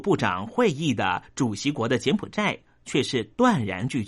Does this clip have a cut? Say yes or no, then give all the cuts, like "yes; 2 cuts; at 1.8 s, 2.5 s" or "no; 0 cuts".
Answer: no; 0 cuts